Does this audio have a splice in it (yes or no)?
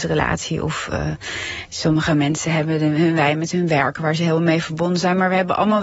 no